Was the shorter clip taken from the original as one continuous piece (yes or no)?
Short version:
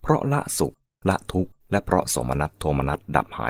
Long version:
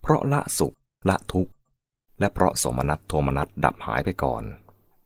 no